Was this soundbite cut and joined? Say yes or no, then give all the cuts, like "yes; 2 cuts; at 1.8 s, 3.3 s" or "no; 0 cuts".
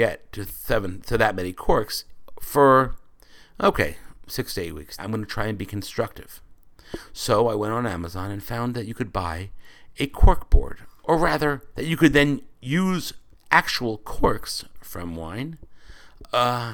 yes; 2 cuts; at 5.0 s, 11.7 s